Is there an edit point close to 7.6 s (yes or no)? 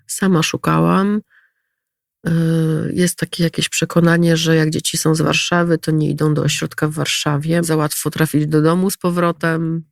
yes